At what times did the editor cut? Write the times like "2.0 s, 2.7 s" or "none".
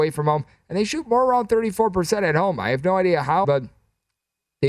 3.4 s